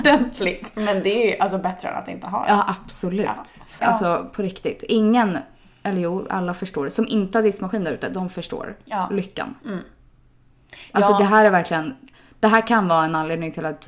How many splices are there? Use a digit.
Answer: 1